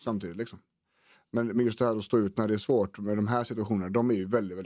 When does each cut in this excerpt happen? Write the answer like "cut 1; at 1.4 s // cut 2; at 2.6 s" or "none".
none